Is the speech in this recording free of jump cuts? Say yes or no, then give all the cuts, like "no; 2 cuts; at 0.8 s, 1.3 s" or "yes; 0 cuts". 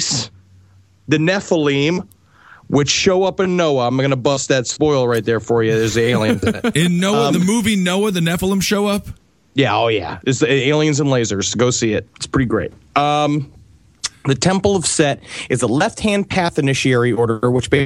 yes; 0 cuts